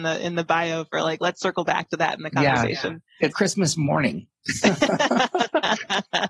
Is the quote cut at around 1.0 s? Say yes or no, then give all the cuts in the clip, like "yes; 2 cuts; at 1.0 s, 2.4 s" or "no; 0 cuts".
no; 1 cut; at 3.3 s